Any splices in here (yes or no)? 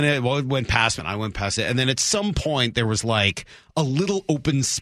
yes